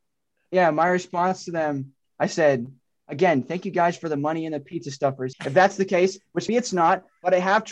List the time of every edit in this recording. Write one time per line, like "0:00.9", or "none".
0:02.0
0:05.3
0:06.5